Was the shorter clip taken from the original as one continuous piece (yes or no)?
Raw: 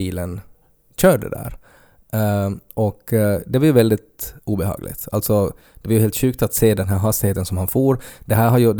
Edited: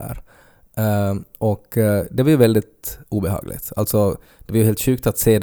yes